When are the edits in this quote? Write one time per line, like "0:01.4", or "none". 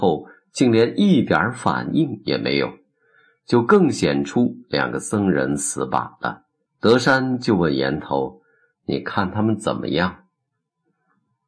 0:06.7